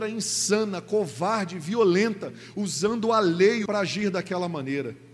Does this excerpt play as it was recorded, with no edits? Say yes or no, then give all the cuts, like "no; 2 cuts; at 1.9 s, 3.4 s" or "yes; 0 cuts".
no; 1 cut; at 3.7 s